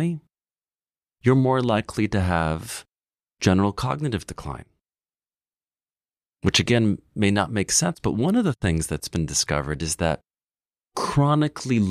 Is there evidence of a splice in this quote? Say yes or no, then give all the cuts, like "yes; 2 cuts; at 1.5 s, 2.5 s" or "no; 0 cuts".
no; 0 cuts